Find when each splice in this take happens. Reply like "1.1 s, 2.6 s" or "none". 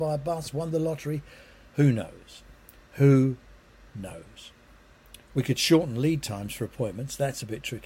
5.2 s